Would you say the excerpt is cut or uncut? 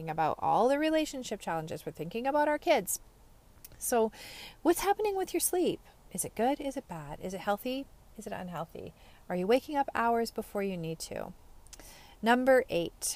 uncut